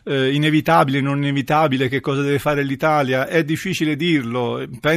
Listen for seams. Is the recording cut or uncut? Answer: uncut